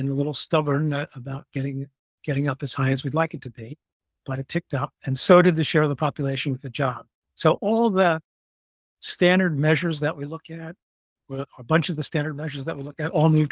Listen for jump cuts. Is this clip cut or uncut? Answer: uncut